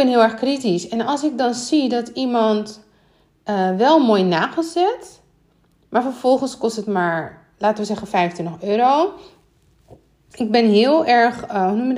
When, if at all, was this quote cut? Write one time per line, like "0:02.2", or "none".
0:10.3